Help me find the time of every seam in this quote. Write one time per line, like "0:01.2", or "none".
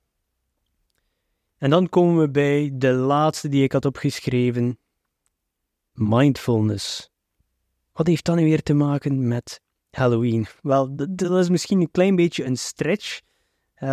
none